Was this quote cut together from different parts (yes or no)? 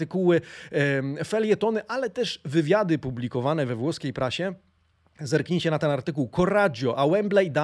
no